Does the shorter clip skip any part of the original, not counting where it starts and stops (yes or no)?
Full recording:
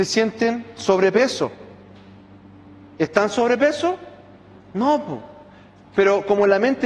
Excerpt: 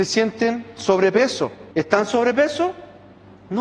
yes